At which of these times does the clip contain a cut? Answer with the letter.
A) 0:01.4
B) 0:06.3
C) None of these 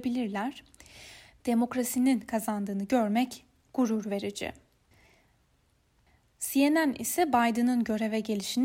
A